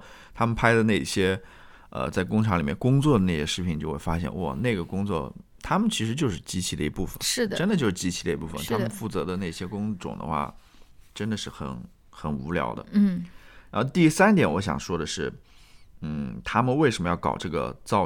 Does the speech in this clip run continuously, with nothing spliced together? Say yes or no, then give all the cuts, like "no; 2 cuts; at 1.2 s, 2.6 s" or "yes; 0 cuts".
yes; 0 cuts